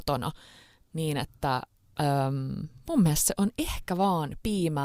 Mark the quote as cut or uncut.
uncut